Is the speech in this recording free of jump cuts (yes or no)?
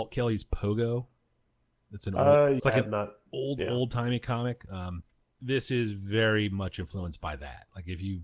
no